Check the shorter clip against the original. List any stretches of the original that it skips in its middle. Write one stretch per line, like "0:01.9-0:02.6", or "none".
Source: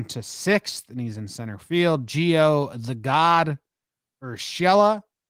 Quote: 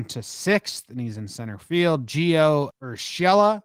0:02.7-0:04.1